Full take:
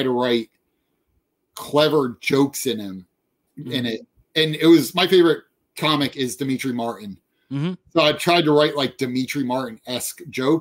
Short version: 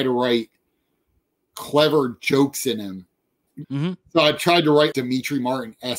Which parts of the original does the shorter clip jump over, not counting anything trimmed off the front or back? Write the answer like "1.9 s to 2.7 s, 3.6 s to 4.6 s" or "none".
3.6 s to 7.4 s, 8.7 s to 9.0 s